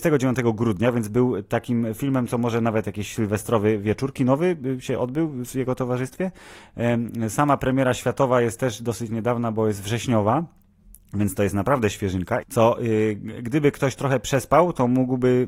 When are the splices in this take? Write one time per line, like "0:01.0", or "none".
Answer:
0:12.4